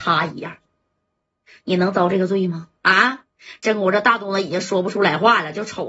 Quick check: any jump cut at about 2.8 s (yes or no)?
yes